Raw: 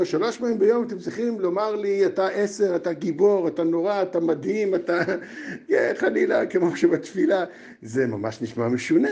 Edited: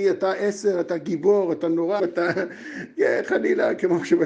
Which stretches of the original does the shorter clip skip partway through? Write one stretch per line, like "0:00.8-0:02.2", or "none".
0:03.9-0:04.7